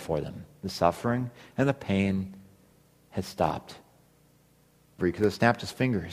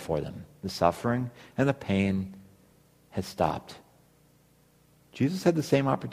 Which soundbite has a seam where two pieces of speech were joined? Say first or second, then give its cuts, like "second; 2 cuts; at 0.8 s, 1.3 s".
first; 1 cut; at 5.0 s